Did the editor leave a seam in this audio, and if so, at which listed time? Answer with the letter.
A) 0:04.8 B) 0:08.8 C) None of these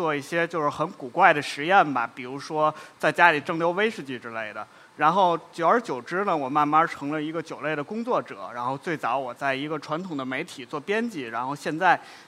C